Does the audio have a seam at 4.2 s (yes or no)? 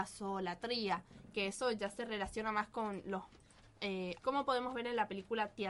yes